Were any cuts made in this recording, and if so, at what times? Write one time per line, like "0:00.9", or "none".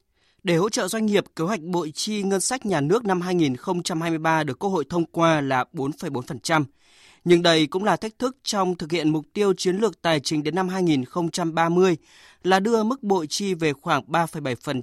none